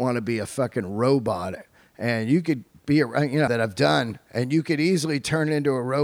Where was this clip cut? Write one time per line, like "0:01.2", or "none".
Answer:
0:03.5